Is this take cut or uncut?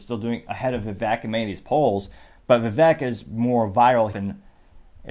cut